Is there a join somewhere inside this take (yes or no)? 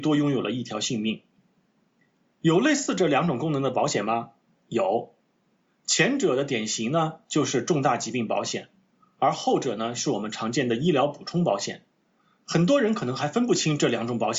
no